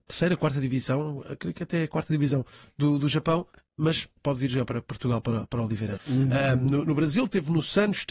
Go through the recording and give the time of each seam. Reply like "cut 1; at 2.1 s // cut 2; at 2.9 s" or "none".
cut 1; at 6.0 s